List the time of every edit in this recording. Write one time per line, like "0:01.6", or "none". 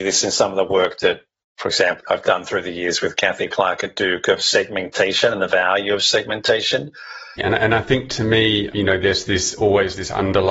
0:02.0
0:07.4